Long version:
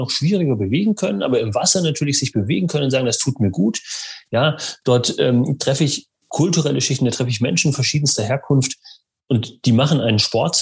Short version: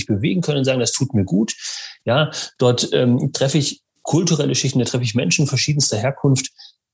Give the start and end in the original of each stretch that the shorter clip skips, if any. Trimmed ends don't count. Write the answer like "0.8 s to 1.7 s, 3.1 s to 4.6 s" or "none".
none